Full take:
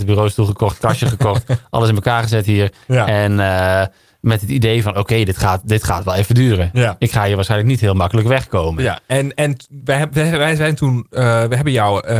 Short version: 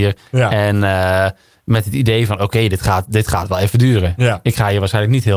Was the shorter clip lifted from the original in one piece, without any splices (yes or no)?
yes